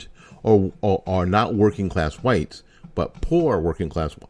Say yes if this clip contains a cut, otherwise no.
yes